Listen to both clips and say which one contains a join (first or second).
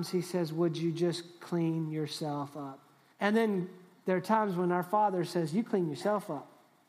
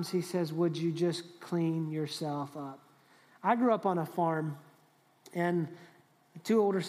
first